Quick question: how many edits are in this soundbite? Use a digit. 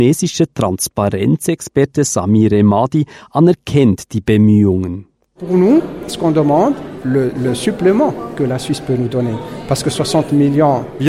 2